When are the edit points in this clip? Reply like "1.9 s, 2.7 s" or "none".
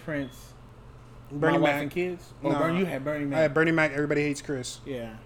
none